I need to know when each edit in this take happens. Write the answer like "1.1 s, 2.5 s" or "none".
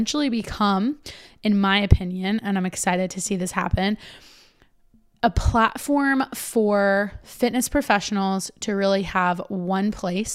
none